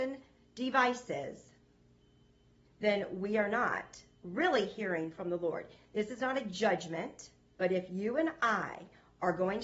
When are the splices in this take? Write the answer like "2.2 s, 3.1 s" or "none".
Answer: 7.6 s